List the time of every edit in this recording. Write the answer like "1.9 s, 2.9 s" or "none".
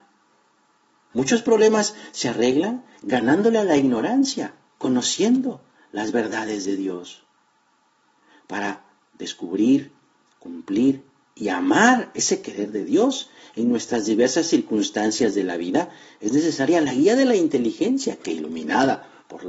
1.1 s